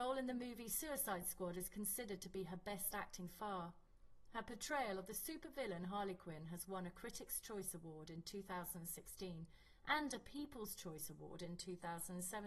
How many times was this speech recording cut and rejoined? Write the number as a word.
one